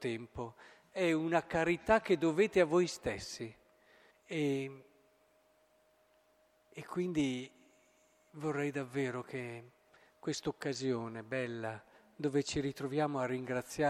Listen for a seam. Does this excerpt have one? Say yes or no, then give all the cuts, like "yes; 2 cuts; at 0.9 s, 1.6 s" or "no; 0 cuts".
yes; 1 cut; at 4.1 s